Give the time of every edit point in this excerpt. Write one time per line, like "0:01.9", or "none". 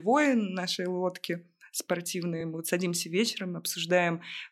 none